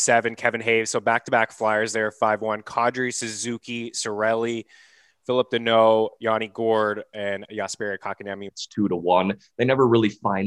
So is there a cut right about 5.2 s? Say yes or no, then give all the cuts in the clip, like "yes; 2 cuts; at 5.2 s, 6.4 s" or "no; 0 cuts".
no; 2 cuts; at 7.1 s, 8.5 s